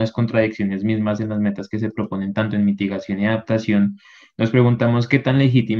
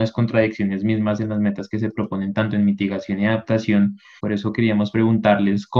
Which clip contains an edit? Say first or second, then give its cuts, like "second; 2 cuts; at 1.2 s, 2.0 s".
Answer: second; 1 cut; at 4.2 s